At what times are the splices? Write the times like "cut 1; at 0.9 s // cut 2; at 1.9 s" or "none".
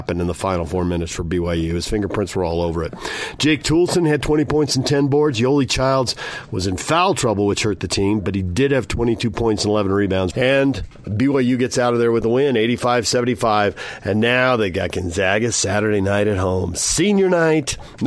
cut 1; at 10.3 s